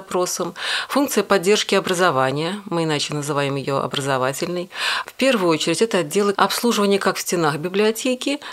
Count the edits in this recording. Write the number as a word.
two